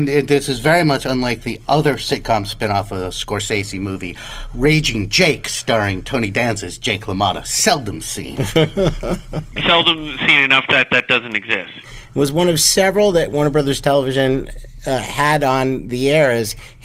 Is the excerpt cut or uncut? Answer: cut